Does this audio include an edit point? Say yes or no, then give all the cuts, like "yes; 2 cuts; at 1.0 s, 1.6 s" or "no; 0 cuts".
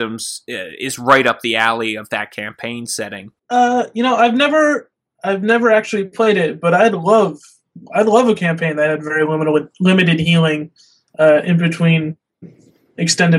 yes; 1 cut; at 3.4 s